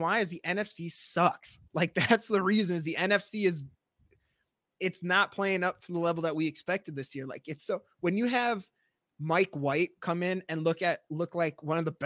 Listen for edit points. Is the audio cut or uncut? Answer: uncut